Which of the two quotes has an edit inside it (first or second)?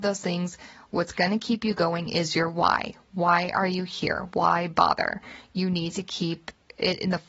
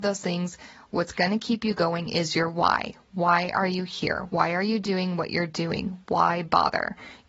first